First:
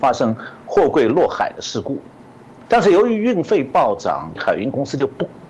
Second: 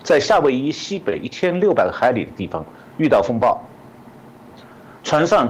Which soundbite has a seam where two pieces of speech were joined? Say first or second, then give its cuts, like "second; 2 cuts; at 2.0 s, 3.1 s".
first; 2 cuts; at 2.7 s, 4.4 s